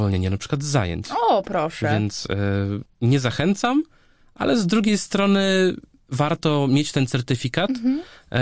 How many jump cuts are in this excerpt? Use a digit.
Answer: 0